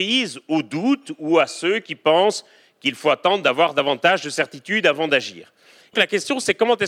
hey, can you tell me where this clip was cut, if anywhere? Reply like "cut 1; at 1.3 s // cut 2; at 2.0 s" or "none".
cut 1; at 5.9 s